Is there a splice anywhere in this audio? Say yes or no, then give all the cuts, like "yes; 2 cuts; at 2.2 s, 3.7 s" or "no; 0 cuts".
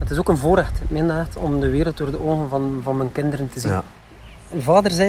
no; 0 cuts